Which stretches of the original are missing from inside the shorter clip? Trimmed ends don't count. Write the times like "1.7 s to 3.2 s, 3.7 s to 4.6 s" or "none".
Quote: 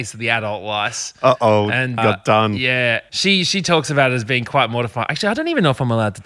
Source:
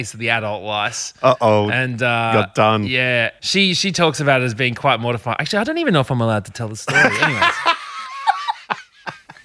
2.0 s to 2.3 s

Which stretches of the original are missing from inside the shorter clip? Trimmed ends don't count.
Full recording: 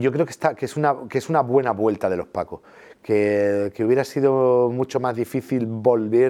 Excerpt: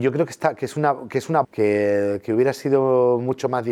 1.4 s to 2.9 s

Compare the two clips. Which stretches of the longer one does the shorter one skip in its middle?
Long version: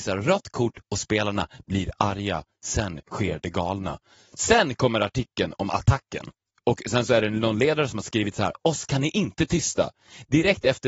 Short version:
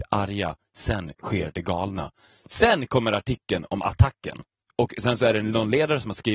none

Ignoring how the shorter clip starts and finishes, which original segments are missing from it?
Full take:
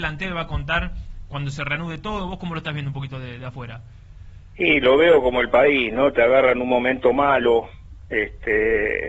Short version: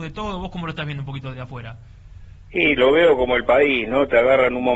3.2 s to 3.4 s

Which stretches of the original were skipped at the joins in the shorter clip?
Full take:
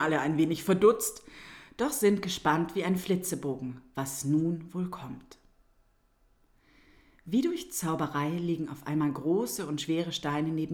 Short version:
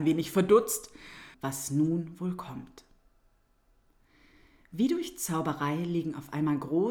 1.7 s to 3.9 s

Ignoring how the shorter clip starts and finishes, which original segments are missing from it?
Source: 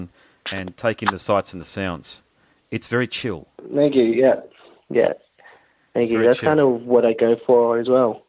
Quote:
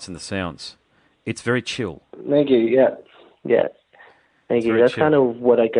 none

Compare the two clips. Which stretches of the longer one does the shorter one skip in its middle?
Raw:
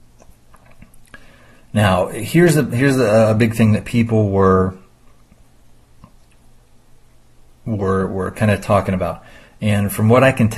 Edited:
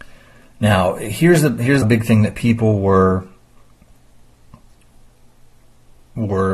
2.9 s to 3.3 s

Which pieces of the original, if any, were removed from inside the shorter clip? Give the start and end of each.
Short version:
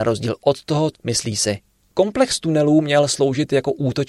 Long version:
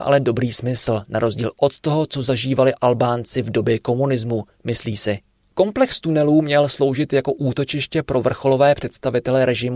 2.1 s to 4.5 s

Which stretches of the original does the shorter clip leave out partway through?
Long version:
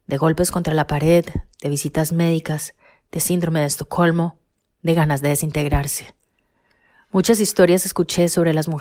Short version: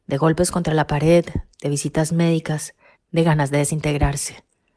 3.0 s to 4.7 s

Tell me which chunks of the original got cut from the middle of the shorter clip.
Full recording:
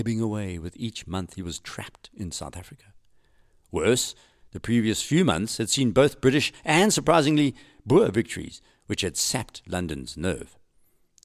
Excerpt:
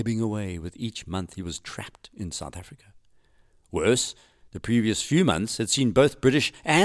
none

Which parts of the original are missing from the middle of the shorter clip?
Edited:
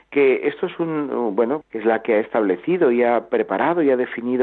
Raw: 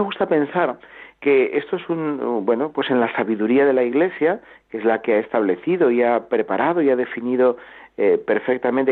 2.7 s to 4.6 s

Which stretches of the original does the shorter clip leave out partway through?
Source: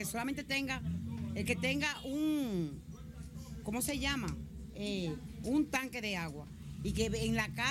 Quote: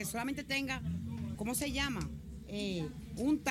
1.3 s to 3.6 s

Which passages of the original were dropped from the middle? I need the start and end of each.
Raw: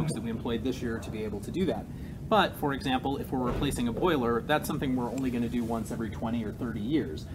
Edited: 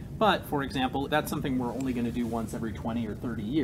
3.2 s to 4.4 s

